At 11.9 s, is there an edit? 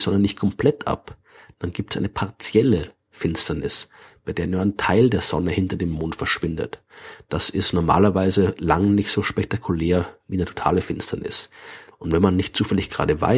yes; 1 cut; at 11.9 s

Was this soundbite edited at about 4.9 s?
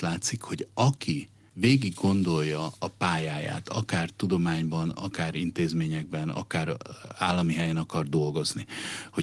yes; 1 cut; at 4.9 s

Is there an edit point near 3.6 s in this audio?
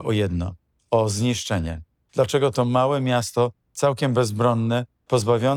no; 1 cut; at 2.0 s

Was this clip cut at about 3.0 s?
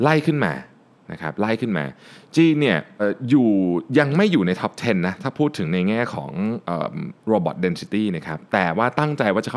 yes; 1 cut; at 3.0 s

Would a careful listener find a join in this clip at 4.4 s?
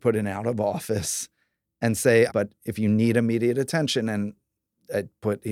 no; 1 cut; at 2.3 s

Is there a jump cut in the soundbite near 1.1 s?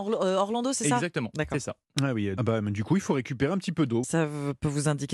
no; 2 cuts; at 2.4 s, 4.0 s

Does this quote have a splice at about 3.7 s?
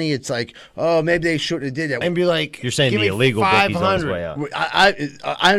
no; 1 cut; at 2.0 s

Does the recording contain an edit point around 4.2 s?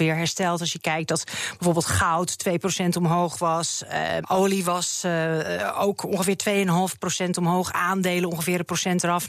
yes; 1 cut; at 4.2 s

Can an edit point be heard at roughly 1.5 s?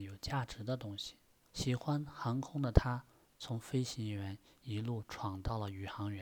yes; 1 cut; at 1.5 s

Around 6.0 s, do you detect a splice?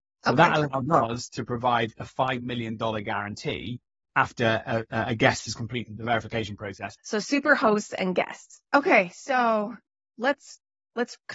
yes; 3 cuts; at 6.0 s, 7.0 s, 8.6 s

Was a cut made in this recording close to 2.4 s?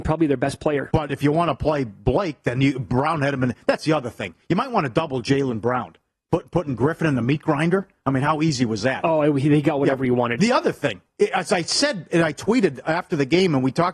no; 0 cuts

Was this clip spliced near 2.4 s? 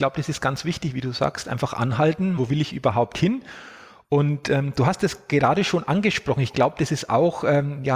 yes; 1 cut; at 2.4 s

